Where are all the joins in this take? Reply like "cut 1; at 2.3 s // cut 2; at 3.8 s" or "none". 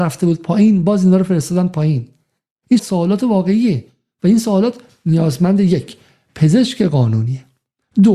cut 1; at 2.8 s